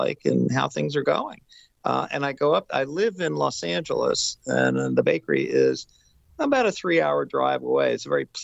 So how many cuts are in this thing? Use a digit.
0